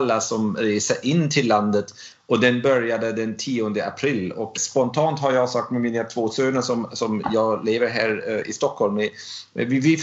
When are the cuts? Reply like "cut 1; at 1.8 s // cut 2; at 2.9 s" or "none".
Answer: cut 1; at 4.6 s